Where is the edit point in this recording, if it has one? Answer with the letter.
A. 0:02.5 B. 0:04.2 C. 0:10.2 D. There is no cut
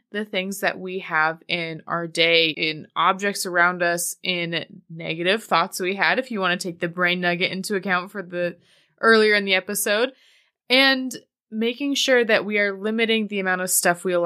A